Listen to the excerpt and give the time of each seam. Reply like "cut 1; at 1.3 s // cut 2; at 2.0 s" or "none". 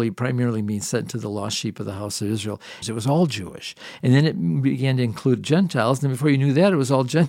cut 1; at 2.8 s